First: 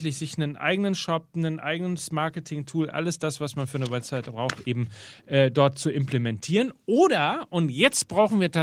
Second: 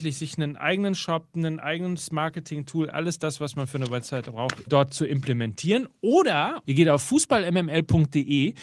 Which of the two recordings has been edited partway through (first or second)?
second